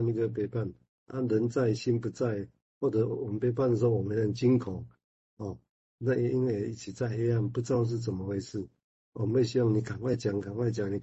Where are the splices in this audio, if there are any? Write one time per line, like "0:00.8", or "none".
none